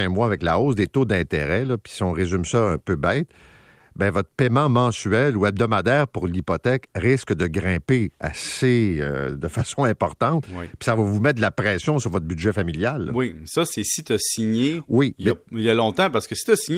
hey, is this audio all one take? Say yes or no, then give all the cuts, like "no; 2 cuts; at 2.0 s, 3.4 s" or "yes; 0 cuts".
yes; 0 cuts